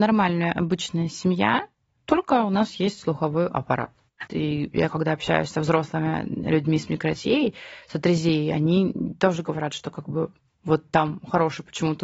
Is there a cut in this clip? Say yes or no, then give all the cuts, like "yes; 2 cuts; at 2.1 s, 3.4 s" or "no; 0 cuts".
yes; 1 cut; at 4.3 s